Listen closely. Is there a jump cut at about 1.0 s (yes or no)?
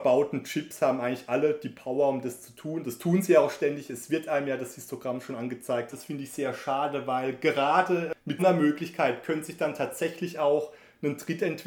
no